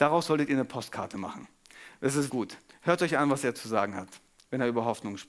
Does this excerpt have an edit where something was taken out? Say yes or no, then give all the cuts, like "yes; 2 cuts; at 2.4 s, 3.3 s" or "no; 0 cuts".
yes; 1 cut; at 2.3 s